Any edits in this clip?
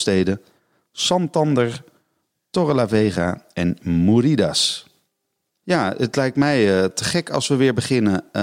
yes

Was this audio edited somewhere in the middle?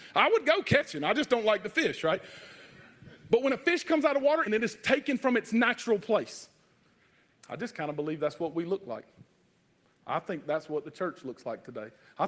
yes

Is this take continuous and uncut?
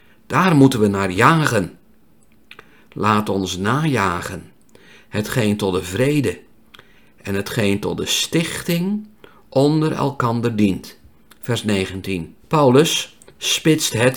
no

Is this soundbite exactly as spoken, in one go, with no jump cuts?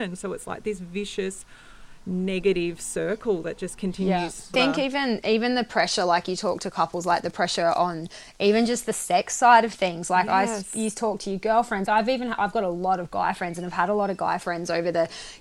no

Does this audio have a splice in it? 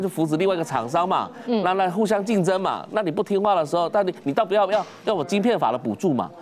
no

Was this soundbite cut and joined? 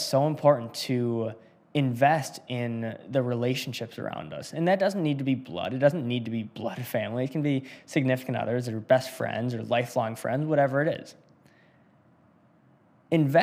no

